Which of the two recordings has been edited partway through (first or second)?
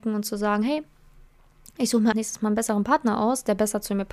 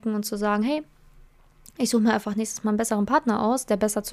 first